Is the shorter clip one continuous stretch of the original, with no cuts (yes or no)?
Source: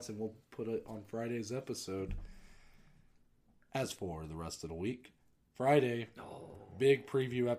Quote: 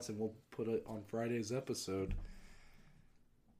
yes